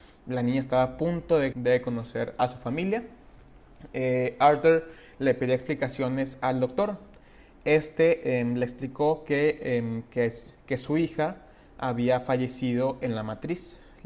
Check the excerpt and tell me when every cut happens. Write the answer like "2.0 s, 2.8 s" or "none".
1.5 s